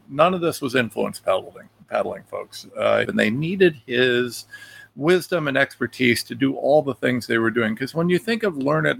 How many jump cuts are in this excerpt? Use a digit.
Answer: 1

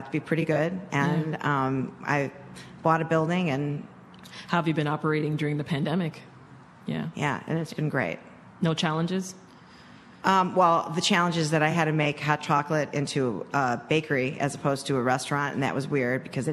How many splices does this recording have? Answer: 1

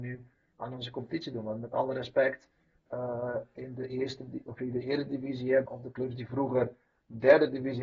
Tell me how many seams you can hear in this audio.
2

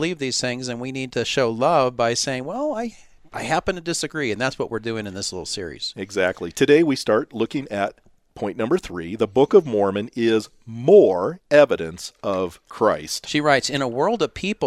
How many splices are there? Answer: 1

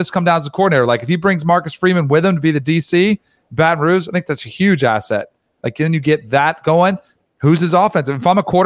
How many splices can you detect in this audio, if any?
0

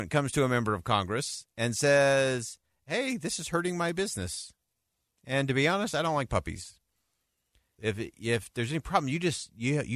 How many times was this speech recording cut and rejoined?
1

